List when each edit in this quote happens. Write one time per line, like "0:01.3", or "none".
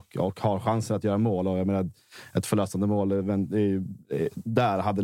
none